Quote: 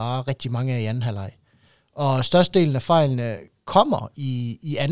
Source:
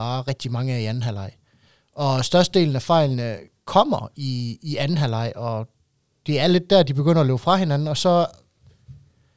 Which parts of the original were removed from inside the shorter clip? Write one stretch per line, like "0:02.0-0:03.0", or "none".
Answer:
none

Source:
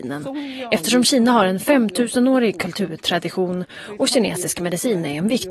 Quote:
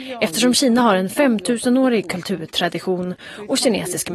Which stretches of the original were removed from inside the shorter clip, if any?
none

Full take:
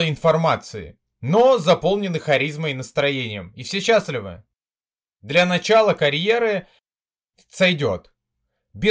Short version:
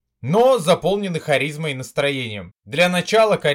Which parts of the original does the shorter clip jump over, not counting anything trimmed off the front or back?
0:03.5-0:05.1

